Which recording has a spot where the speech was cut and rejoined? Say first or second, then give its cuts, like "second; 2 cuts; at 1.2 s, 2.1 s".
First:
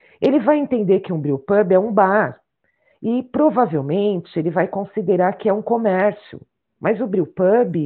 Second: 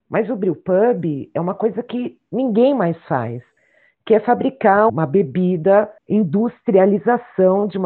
second; 2 cuts; at 4.9 s, 6.0 s